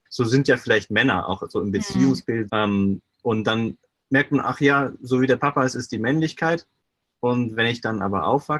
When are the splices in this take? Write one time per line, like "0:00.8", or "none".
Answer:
0:02.5